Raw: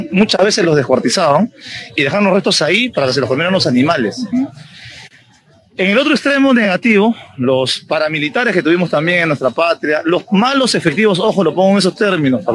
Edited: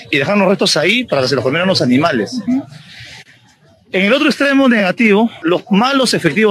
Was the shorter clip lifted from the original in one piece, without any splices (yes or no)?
no